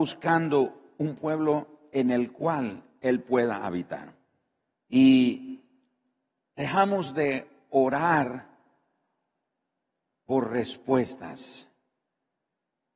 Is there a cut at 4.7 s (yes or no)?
yes